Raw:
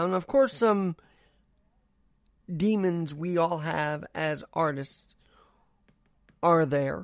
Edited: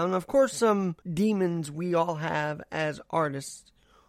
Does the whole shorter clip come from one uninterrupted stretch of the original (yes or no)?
no